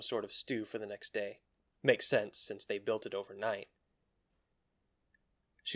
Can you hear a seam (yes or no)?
yes